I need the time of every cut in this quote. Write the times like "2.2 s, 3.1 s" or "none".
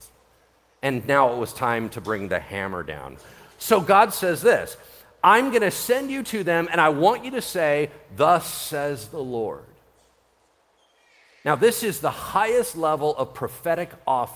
none